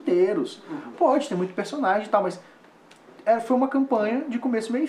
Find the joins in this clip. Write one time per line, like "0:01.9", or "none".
0:00.9